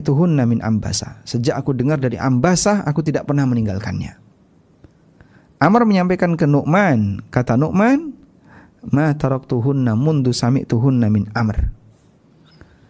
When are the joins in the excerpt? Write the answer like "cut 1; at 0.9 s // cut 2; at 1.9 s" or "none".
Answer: none